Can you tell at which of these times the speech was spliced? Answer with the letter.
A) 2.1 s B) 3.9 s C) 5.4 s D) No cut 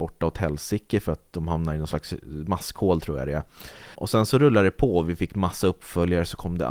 B